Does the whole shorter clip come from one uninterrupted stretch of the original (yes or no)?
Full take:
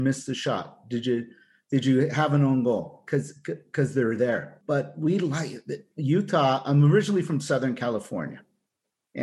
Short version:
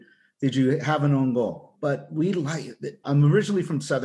no